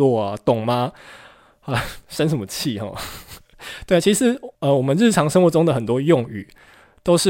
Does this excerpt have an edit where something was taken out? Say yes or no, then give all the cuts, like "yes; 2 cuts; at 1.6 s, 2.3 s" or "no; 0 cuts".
no; 0 cuts